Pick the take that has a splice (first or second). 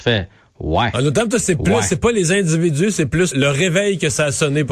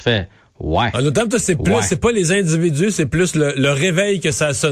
first